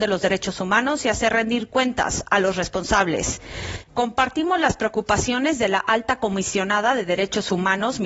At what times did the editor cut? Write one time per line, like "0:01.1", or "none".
0:03.9